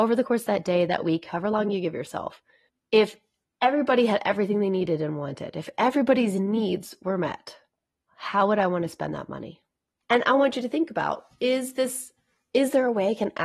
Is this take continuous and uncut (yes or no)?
yes